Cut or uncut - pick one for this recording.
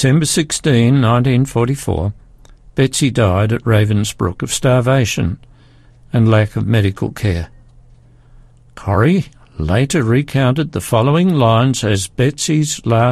uncut